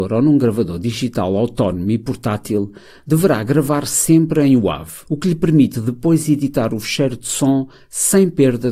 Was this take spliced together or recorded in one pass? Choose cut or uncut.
cut